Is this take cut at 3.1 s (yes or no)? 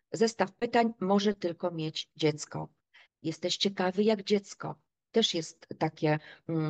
yes